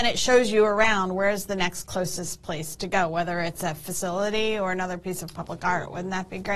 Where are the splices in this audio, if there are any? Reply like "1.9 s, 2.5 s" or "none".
none